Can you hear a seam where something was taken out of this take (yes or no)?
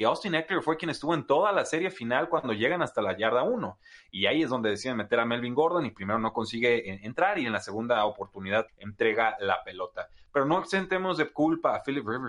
yes